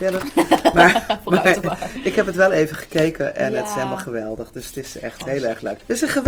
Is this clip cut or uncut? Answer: uncut